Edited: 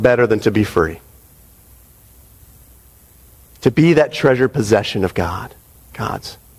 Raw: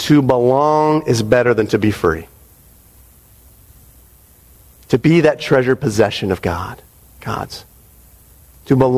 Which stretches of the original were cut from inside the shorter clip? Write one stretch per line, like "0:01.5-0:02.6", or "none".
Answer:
none